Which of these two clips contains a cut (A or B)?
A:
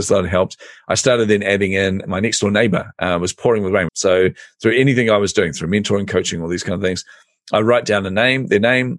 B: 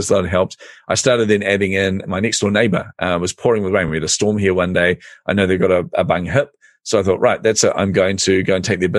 A